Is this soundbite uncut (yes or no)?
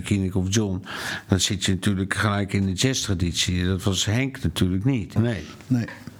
no